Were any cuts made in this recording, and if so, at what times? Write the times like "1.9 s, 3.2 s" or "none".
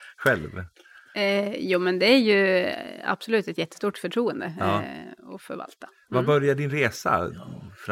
none